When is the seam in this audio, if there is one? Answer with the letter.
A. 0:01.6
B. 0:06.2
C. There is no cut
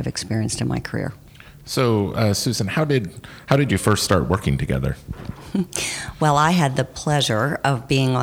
C